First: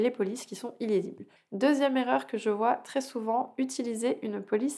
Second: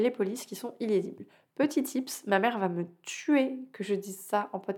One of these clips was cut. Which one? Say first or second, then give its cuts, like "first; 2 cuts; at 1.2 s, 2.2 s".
first; 1 cut; at 1.4 s